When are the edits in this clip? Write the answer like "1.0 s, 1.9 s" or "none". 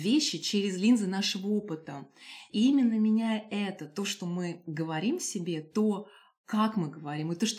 2.5 s

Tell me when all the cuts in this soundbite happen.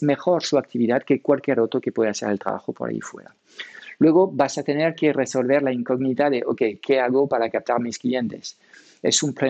none

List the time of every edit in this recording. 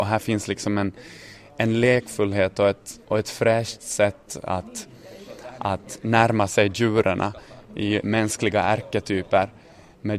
3.0 s, 8.0 s

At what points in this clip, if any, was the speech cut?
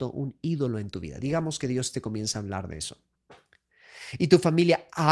none

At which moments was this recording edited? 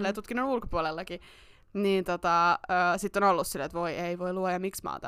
none

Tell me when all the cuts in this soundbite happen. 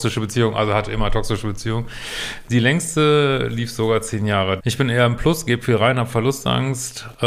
4.6 s

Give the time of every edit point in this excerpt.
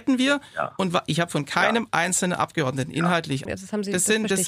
3.5 s

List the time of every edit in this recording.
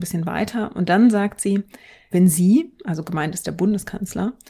2.1 s

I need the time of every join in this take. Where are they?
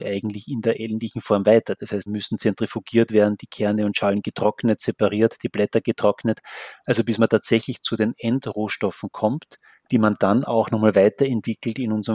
2.1 s

